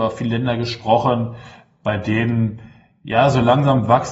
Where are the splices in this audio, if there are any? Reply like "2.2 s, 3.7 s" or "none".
none